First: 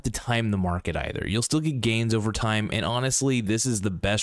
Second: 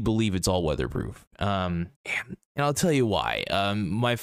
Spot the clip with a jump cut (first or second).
second